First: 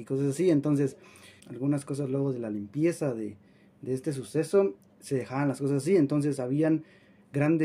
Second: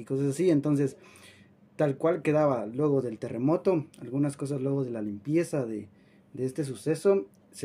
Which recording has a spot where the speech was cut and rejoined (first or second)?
first